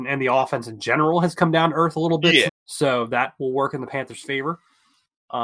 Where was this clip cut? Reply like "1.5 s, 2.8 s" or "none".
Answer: 2.5 s